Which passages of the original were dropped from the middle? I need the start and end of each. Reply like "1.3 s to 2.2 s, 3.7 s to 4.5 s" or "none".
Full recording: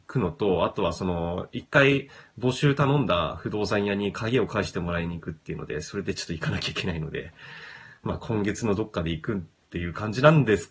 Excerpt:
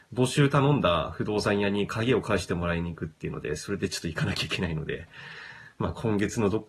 none